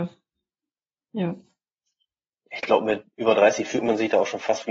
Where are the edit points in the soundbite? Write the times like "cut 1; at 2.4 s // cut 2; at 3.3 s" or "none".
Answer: none